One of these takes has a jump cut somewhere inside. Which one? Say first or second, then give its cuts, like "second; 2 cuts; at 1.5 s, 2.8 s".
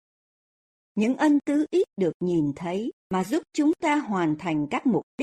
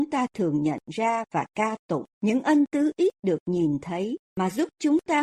second; 1 cut; at 2.1 s